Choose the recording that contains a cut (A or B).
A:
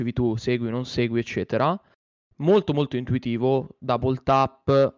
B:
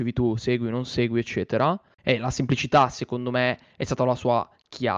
B